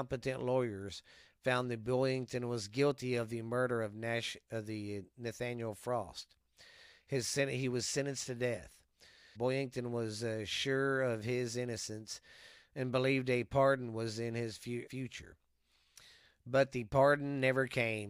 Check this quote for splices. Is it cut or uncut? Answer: cut